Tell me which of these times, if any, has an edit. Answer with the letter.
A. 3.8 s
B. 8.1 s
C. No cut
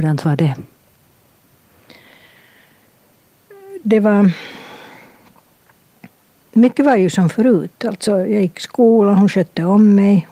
C